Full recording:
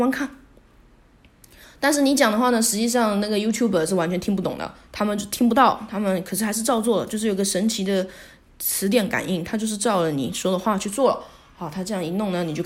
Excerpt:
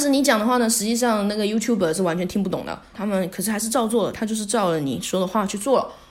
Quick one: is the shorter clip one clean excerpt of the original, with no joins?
no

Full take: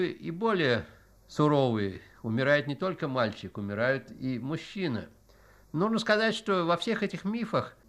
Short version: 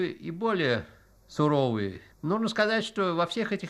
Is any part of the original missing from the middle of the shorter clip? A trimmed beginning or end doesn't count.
yes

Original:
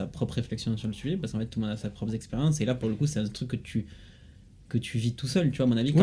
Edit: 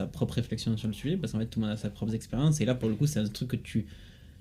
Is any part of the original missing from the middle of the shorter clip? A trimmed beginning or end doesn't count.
no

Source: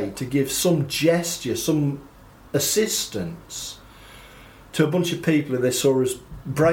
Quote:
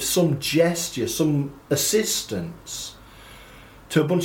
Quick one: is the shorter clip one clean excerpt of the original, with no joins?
no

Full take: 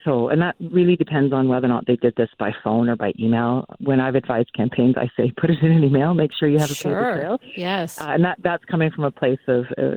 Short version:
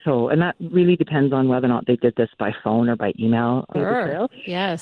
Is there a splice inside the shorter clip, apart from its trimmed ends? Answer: yes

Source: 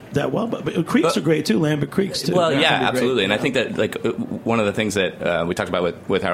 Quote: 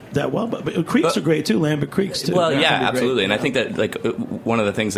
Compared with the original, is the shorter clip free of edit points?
yes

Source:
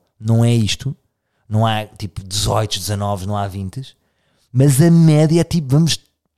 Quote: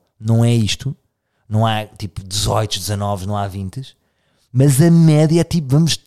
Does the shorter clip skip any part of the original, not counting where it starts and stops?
no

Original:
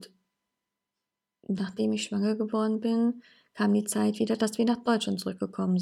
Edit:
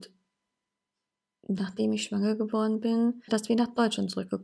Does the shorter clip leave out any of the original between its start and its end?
yes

